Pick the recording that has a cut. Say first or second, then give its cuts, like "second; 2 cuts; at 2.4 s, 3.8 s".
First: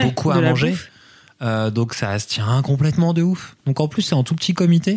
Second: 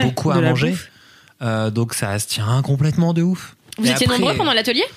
first; 1 cut; at 3.6 s